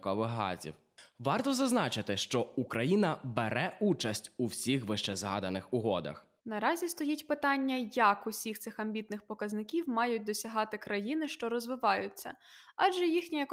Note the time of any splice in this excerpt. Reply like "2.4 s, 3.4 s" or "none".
6.4 s